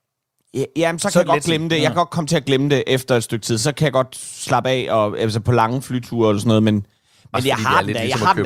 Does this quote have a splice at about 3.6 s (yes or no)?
no